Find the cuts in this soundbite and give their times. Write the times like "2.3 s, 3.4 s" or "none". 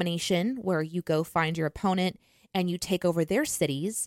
none